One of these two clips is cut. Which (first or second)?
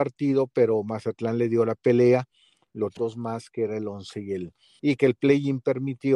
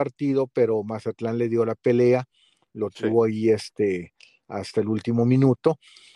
first